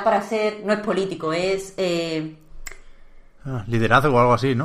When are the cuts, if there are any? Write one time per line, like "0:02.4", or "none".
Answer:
none